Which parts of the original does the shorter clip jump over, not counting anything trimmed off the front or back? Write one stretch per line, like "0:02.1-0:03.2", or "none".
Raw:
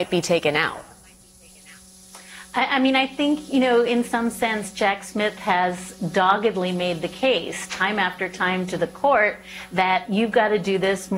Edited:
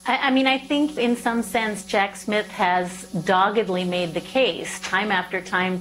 0:03.5-0:03.8

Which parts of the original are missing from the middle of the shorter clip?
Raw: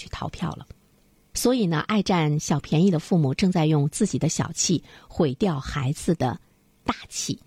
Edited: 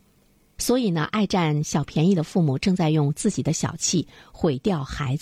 none

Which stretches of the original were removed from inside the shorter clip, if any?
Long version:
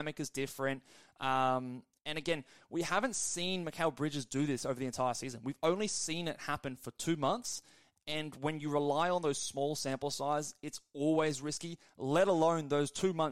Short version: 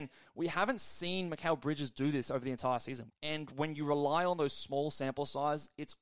0:05.4-0:07.9

